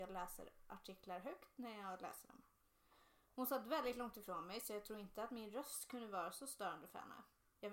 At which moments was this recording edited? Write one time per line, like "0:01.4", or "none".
none